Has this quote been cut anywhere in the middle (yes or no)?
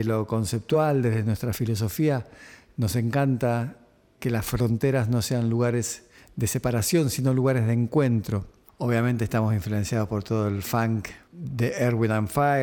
yes